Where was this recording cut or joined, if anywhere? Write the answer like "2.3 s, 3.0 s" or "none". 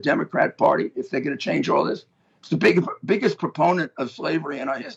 none